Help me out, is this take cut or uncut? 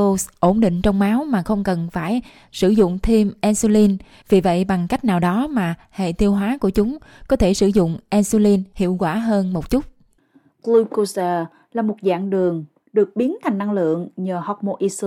uncut